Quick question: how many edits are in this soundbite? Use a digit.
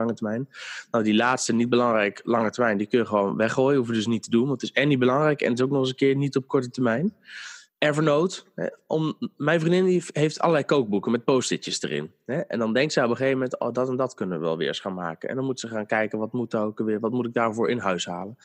1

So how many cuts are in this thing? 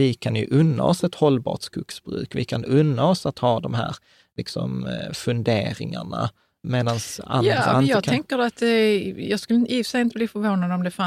0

